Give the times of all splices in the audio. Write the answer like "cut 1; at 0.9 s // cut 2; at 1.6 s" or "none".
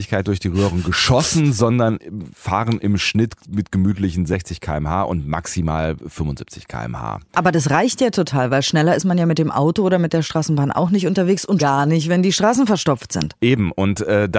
cut 1; at 11.6 s